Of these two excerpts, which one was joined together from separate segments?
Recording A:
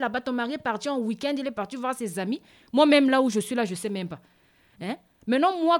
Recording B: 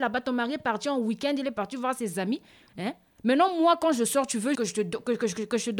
B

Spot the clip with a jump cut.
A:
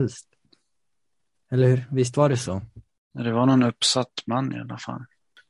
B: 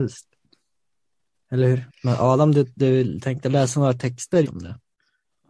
B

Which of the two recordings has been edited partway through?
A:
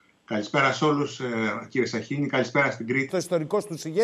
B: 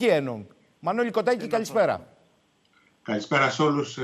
A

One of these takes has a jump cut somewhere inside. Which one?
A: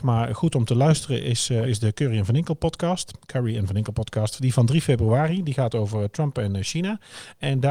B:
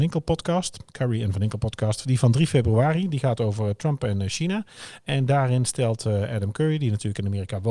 A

